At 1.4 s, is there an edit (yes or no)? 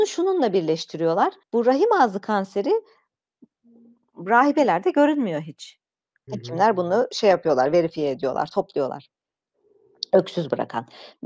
yes